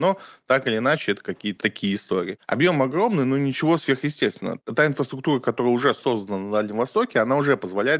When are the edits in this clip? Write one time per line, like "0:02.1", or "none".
0:01.6

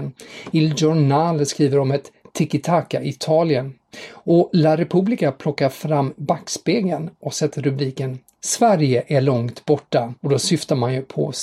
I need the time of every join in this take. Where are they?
0:10.2

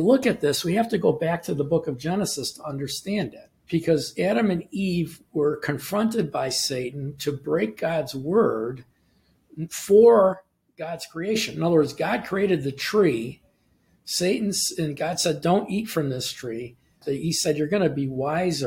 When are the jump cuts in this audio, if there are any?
0:03.6
0:17.0

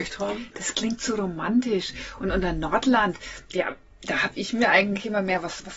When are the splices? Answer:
none

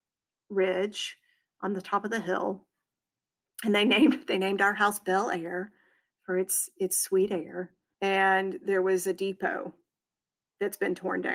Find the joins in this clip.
0:07.9

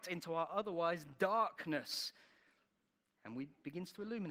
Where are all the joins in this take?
none

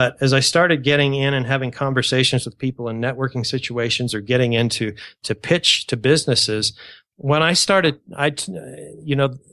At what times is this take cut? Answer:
none

